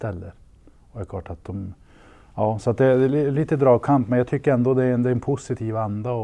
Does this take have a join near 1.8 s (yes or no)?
no